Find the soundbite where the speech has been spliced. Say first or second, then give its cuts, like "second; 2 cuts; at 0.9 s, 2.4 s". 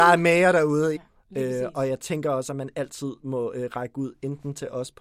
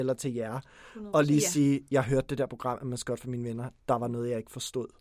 first; 1 cut; at 1.0 s